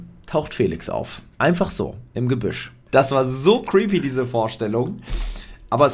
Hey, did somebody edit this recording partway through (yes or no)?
yes